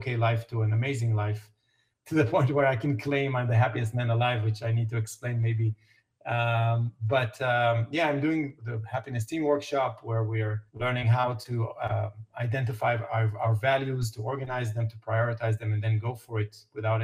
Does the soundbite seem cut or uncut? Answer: cut